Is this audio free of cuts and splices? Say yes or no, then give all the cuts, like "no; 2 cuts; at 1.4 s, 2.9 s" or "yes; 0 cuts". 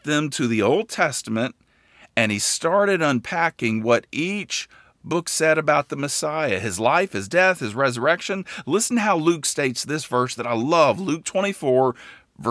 yes; 0 cuts